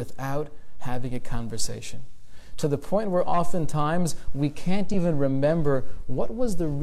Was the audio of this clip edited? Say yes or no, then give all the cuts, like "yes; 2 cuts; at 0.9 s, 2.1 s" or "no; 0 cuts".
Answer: no; 0 cuts